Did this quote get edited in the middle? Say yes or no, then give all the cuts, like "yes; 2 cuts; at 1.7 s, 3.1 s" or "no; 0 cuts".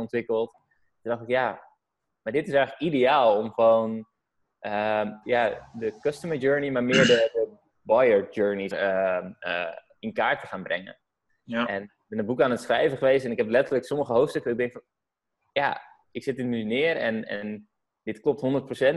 yes; 2 cuts; at 5.2 s, 8.7 s